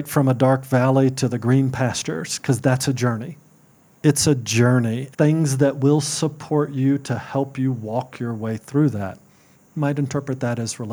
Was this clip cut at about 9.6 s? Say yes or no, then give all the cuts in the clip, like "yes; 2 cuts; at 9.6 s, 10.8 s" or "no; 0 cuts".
no; 2 cuts; at 4.0 s, 5.1 s